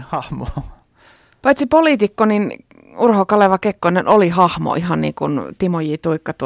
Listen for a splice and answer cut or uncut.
uncut